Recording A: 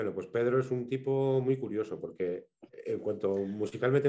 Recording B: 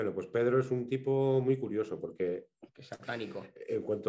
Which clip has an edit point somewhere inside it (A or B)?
A